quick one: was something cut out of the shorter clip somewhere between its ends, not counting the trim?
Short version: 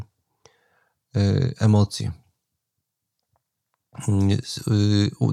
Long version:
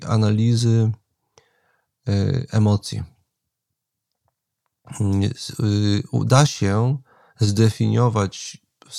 no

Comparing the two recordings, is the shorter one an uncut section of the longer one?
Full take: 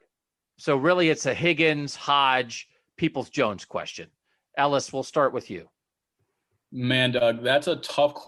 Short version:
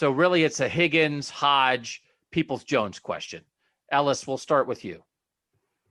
yes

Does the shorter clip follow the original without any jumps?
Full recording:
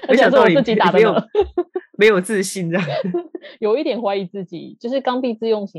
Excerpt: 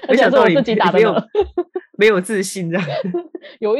yes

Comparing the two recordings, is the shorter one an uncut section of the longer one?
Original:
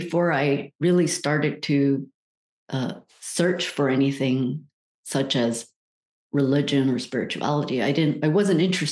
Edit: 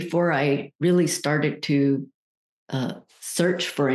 yes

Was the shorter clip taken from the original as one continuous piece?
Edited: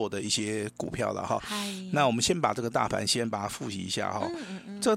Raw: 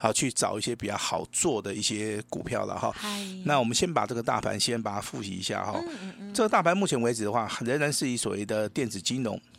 yes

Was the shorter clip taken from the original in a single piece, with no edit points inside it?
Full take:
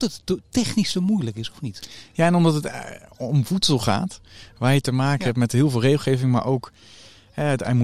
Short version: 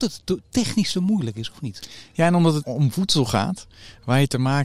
no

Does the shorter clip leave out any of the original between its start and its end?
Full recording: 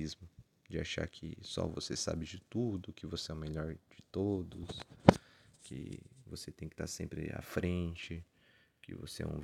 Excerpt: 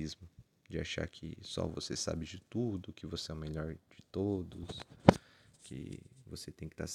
no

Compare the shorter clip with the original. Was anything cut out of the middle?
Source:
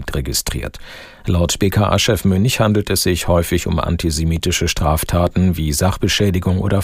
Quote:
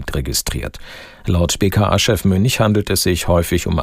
no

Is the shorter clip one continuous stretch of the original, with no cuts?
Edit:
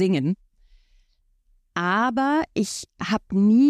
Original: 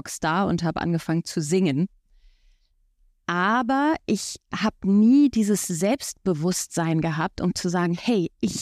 yes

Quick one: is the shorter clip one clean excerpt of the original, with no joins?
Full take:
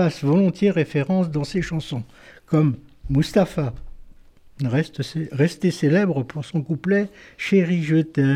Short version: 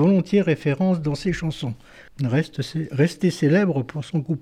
no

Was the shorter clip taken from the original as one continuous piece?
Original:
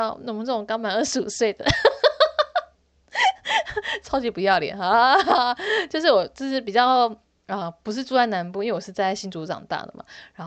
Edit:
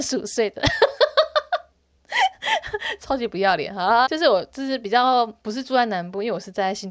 no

